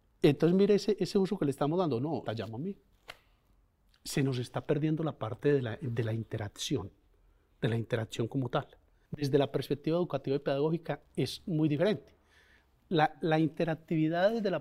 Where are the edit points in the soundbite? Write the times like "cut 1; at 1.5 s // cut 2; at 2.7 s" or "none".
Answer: cut 1; at 2.3 s // cut 2; at 9.1 s